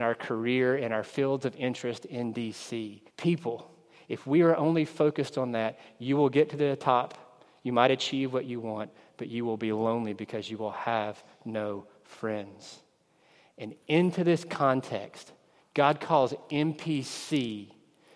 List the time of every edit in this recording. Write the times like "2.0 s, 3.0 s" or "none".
3.1 s, 15.6 s